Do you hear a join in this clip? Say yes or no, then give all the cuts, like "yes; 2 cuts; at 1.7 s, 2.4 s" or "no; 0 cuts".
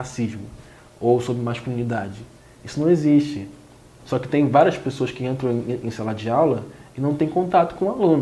no; 0 cuts